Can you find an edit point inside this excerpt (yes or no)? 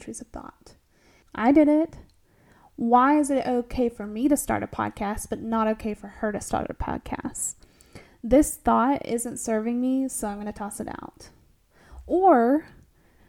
yes